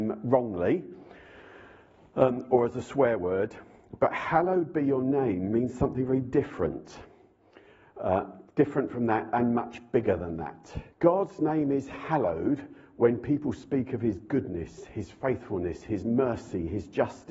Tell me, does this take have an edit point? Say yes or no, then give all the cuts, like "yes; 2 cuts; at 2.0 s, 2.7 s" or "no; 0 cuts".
yes; 1 cut; at 10.9 s